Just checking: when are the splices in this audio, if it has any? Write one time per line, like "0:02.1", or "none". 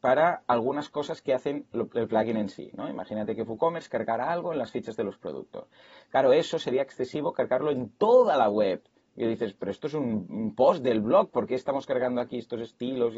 none